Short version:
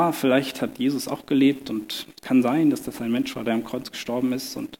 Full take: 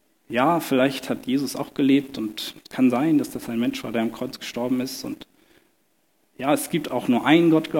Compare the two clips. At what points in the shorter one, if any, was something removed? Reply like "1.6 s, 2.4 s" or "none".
none